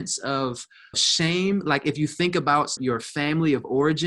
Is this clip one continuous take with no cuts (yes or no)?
no